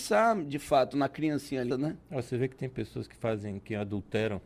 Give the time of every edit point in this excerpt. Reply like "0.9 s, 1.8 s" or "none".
1.7 s